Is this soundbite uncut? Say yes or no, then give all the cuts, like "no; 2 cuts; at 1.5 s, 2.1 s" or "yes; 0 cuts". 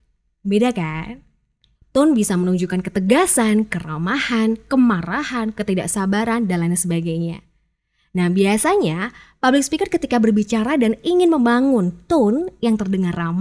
no; 1 cut; at 1.7 s